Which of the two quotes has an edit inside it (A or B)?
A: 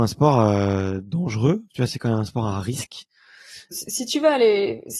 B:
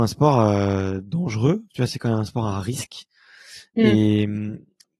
A